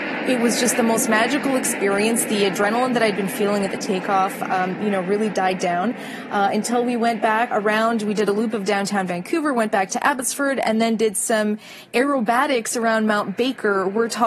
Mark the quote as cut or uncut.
cut